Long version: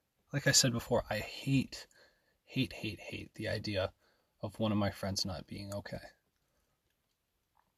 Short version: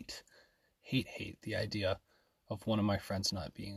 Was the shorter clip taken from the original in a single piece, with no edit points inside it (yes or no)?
no